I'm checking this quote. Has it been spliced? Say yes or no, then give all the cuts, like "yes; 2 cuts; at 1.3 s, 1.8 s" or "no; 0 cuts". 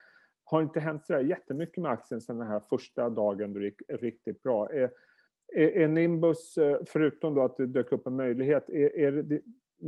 no; 0 cuts